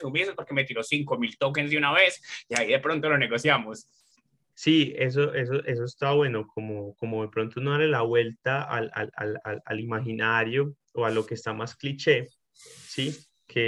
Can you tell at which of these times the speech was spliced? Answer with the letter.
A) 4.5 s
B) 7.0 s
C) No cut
A